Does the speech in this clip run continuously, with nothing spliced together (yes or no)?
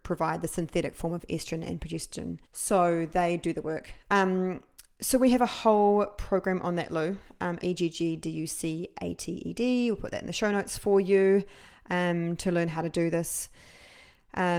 no